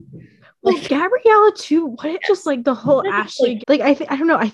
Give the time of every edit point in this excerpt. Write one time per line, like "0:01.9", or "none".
0:02.2
0:03.6